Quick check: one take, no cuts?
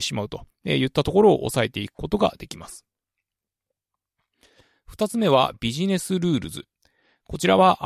yes; 0 cuts

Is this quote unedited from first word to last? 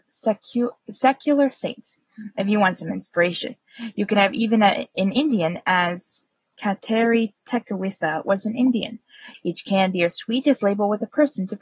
no; 1 cut; at 9.3 s

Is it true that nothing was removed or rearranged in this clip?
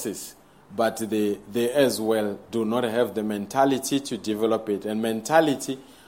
yes; 0 cuts

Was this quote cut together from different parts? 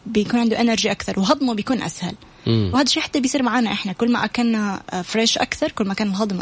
no; 0 cuts

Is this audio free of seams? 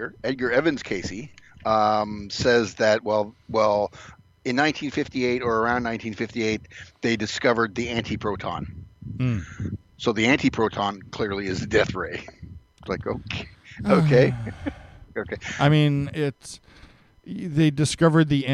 yes; 0 cuts

